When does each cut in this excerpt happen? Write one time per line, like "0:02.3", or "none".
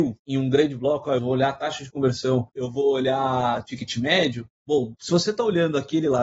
0:01.2